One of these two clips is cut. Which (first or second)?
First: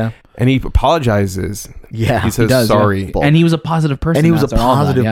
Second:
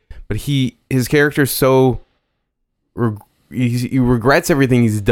first